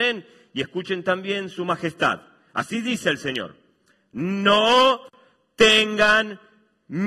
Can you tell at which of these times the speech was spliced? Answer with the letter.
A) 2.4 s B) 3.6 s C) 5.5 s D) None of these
D